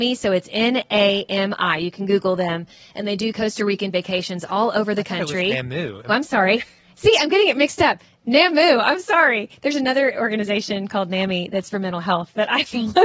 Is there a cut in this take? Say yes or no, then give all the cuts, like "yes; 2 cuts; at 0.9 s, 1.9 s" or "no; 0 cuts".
yes; 1 cut; at 6.1 s